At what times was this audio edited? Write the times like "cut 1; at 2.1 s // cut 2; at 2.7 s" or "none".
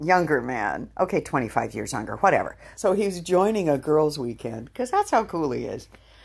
cut 1; at 2.7 s